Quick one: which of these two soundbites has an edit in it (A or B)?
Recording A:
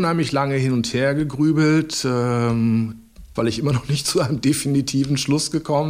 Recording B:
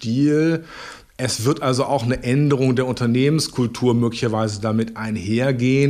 A